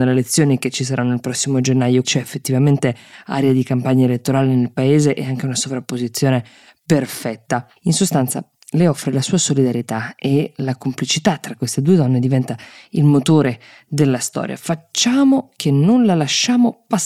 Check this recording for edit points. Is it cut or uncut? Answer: cut